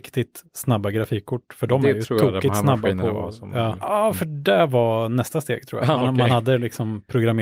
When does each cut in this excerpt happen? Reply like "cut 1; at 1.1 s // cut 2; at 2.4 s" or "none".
cut 1; at 3.8 s